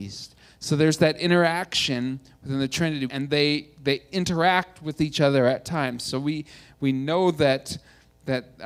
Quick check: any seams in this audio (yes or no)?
yes